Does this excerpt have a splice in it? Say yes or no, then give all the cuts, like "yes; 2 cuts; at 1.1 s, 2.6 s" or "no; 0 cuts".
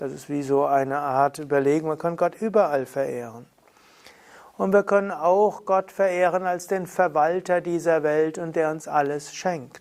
no; 0 cuts